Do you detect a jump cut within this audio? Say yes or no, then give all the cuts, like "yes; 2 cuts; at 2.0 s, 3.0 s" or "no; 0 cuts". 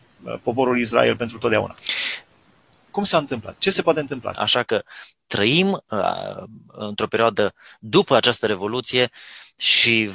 yes; 1 cut; at 4.3 s